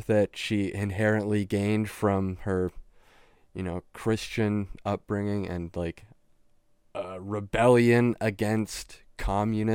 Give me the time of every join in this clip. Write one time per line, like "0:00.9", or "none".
none